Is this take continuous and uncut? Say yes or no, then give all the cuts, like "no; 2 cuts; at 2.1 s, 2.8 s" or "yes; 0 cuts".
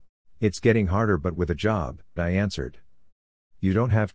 no; 1 cut; at 2.2 s